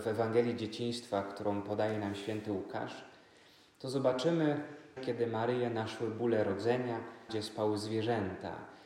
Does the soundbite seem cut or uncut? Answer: cut